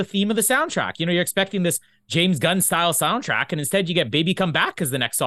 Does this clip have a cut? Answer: no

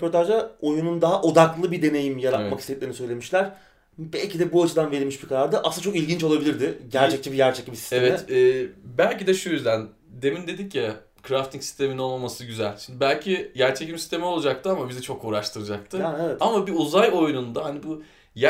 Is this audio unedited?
yes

